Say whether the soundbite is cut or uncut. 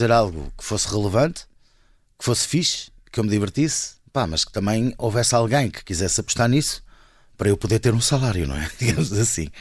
uncut